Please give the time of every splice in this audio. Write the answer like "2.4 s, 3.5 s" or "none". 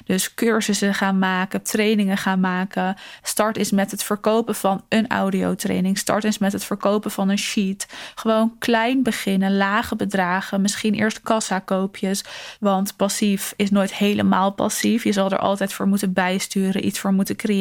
3.2 s, 12.6 s